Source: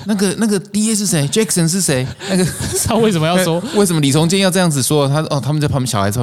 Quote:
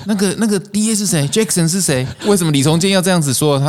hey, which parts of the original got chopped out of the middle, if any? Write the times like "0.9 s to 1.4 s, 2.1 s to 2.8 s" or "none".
2.2 s to 3.7 s